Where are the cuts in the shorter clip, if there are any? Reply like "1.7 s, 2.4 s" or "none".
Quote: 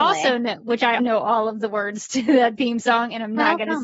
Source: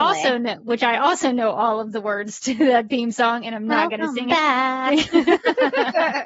1.0 s